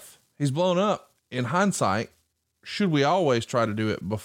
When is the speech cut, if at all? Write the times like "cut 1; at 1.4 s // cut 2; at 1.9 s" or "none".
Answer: cut 1; at 1.2 s